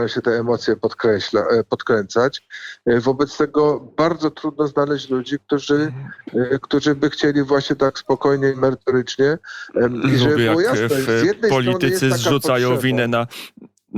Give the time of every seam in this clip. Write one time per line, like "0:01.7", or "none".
none